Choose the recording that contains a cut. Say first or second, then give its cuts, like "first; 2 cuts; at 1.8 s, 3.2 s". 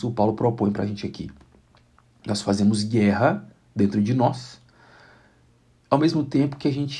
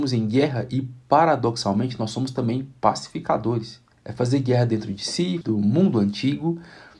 second; 2 cuts; at 3.9 s, 5.4 s